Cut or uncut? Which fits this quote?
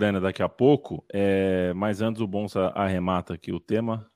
uncut